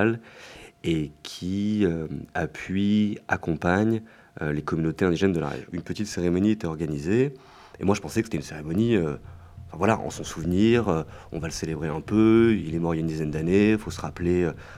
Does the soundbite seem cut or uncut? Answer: uncut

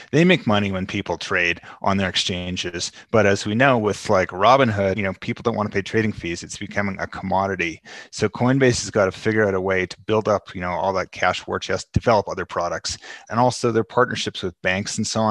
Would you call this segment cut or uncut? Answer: cut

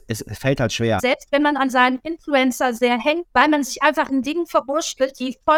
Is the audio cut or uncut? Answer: cut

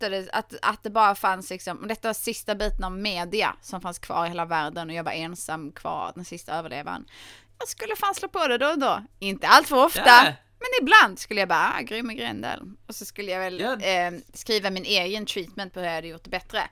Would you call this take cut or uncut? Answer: uncut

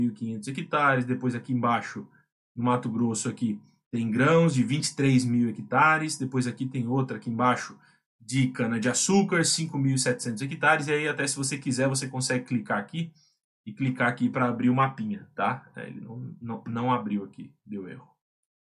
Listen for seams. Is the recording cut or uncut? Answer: uncut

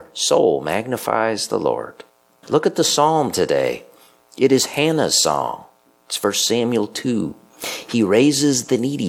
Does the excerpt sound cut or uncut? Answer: cut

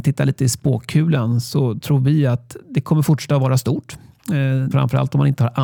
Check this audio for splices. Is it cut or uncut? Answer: cut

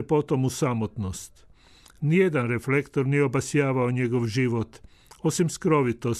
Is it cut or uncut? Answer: uncut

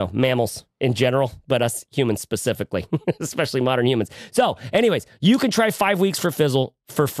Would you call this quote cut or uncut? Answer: uncut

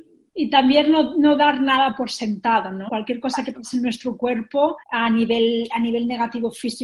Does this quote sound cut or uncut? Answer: cut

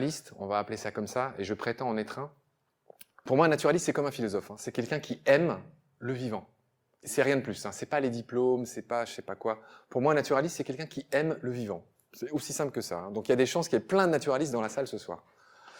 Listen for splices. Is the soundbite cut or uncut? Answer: uncut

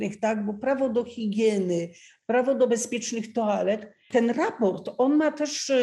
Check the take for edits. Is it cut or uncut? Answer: cut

